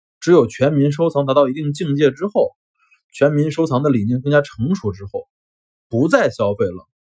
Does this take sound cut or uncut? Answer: uncut